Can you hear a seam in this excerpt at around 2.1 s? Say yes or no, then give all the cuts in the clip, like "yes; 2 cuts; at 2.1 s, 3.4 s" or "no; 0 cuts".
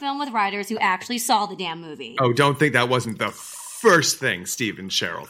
no; 0 cuts